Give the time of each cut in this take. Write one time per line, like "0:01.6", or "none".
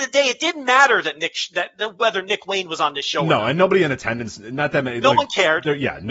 none

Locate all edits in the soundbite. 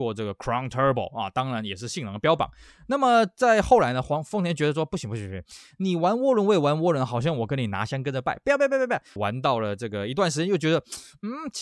0:09.2

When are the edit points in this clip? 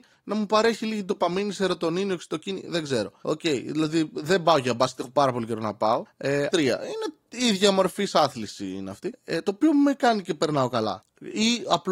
0:06.5

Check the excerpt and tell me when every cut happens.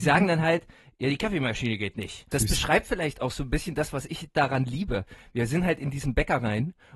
0:02.3

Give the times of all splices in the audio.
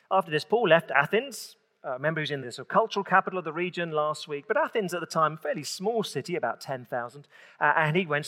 0:02.4

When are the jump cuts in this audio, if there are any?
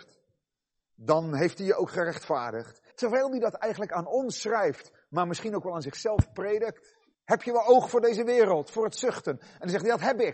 0:02.9
0:07.1

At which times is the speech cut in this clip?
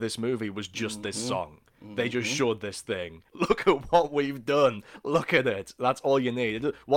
0:03.3

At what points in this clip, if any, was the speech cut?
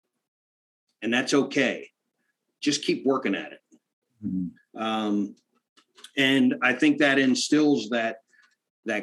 0:04.6

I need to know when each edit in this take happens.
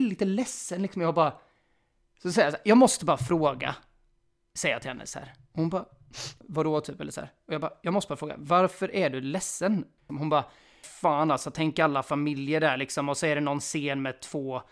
0:06.4
0:10.1

